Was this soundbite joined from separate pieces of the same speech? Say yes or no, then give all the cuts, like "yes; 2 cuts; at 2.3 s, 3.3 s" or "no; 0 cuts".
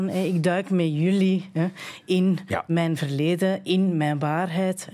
no; 0 cuts